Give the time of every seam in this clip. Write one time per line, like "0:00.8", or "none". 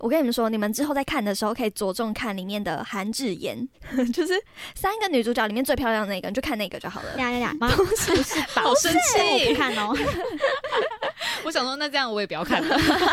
0:07.6